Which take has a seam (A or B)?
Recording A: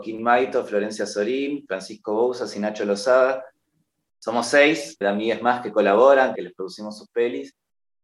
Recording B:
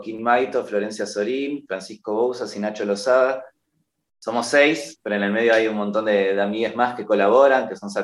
A